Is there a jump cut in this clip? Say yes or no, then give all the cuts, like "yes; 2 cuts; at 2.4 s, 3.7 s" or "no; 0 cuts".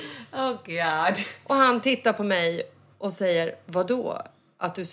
no; 0 cuts